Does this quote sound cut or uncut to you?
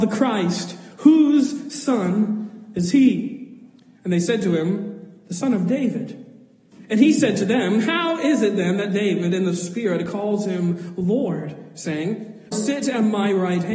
cut